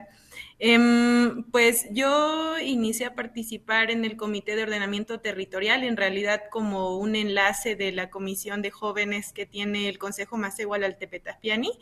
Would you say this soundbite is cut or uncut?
uncut